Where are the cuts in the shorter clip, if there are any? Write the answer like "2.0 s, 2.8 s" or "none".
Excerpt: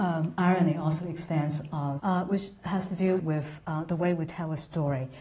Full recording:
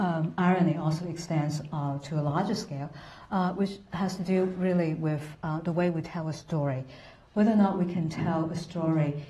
2.0 s, 3.2 s